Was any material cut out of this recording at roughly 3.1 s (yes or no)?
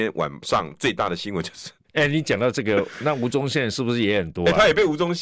no